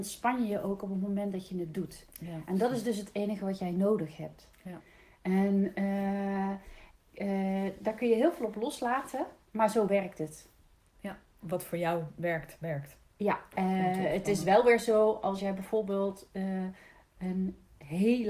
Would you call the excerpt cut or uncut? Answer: uncut